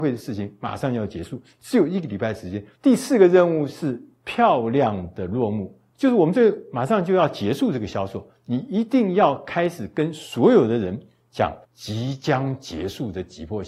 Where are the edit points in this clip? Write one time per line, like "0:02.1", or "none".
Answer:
0:02.7
0:05.9
0:11.6